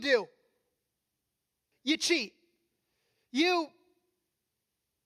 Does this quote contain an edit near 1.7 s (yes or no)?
yes